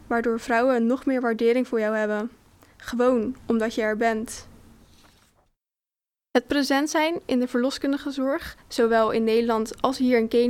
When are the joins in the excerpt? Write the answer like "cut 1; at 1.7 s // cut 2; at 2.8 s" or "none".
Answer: none